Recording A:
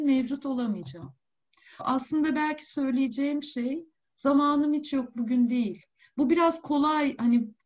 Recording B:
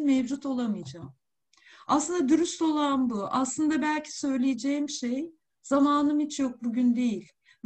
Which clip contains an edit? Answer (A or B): A